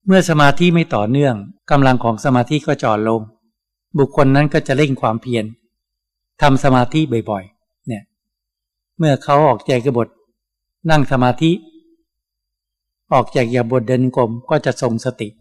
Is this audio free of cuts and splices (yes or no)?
no